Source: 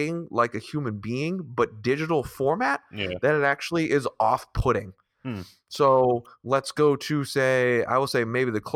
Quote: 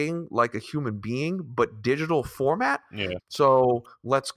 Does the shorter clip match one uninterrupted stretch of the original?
no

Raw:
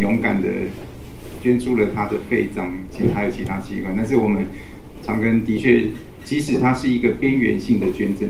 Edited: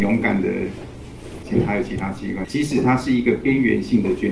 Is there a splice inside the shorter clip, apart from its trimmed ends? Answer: yes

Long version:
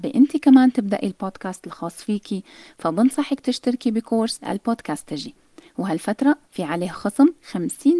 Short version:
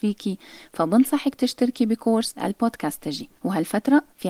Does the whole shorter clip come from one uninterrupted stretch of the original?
no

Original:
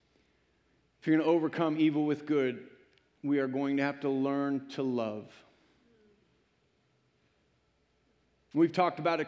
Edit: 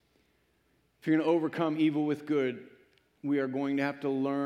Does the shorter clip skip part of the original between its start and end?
no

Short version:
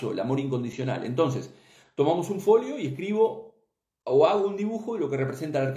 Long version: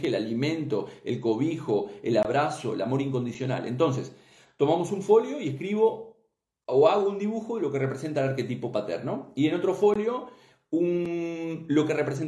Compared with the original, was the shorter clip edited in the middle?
no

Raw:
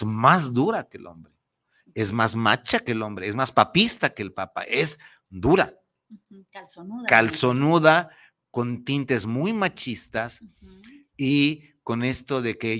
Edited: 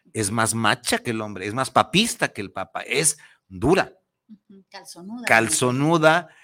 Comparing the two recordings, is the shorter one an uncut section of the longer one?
yes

